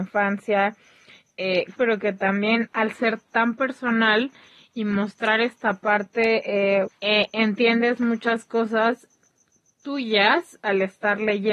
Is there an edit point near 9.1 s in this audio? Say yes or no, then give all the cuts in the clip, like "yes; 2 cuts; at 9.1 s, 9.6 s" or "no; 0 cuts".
no; 2 cuts; at 1.8 s, 6.9 s